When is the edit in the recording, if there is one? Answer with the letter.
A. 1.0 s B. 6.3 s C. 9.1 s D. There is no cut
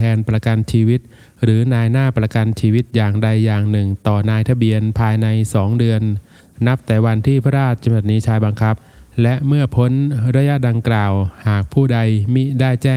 D